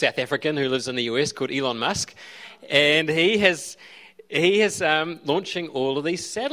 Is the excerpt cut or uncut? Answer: uncut